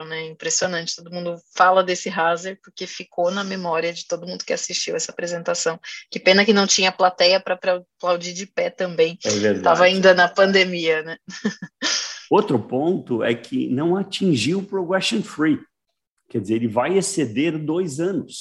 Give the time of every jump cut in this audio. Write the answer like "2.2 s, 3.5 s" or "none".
none